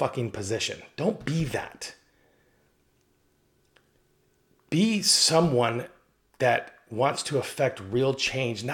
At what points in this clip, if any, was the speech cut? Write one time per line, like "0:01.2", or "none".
none

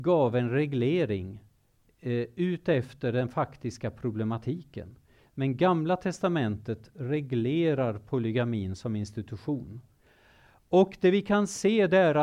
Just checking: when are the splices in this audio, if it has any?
0:05.2

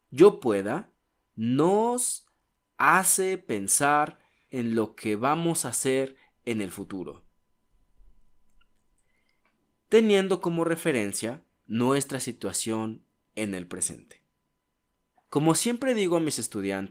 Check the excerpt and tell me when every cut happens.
0:15.1

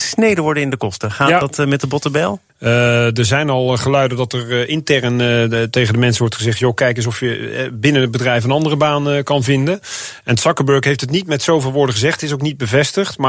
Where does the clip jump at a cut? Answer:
0:02.5

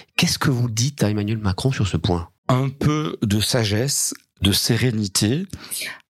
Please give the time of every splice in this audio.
0:02.4

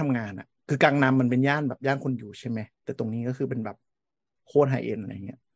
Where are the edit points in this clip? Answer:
0:02.7

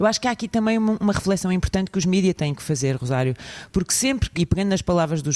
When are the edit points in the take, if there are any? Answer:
0:04.4

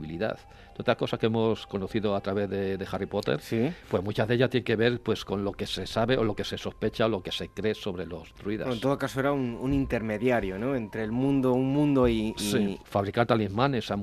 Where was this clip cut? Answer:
0:12.8

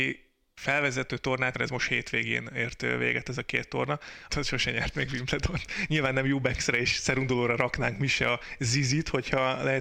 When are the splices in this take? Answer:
0:01.5
0:04.3

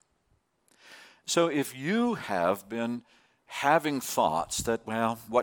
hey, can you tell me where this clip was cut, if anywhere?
none

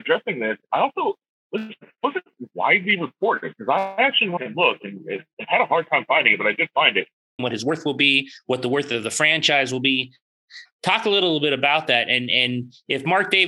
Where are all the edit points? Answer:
0:07.4
0:10.7

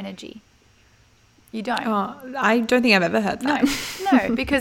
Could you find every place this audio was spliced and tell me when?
none

